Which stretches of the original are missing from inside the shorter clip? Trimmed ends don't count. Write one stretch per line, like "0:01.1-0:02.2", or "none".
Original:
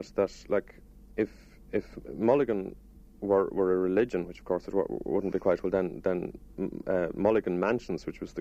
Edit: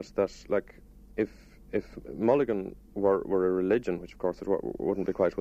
0:02.8-0:03.1

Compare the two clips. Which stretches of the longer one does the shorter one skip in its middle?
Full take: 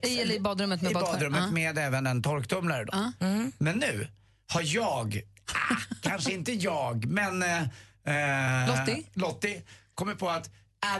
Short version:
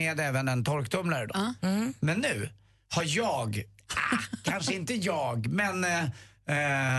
none

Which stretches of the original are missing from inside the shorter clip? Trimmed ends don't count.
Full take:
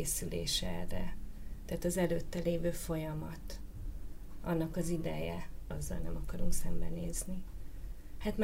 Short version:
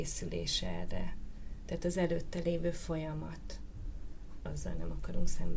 0:04.4-0:05.6

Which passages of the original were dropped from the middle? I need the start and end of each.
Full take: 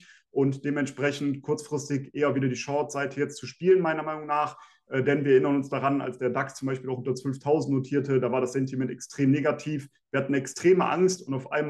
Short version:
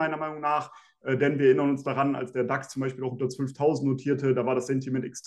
none

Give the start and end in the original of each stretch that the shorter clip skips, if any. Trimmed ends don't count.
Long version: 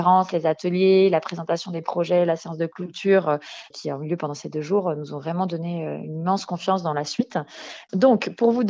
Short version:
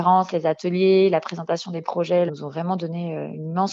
0:02.3-0:05.0

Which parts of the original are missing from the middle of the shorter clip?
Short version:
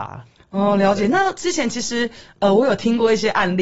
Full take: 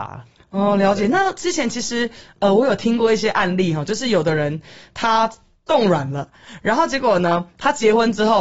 none

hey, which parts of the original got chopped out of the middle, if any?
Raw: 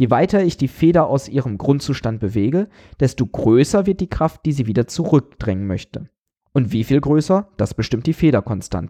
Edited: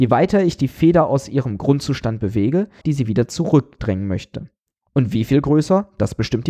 0:02.8-0:04.4

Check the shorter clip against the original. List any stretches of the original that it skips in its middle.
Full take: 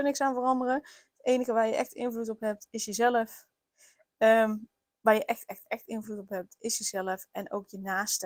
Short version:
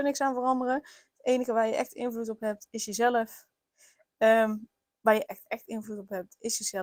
0:05.3-0:05.5

